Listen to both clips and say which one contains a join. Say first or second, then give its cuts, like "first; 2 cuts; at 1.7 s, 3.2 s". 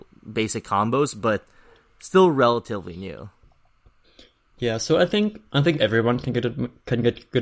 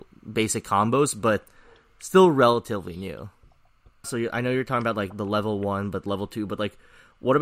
second; 1 cut; at 4.0 s